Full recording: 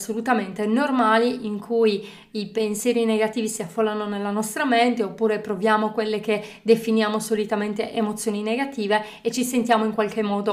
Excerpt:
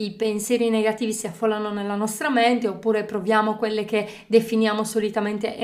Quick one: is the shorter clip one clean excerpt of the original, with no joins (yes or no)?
yes